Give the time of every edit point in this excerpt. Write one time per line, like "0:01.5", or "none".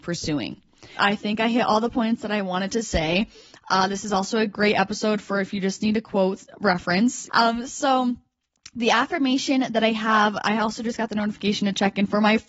0:01.0
0:07.3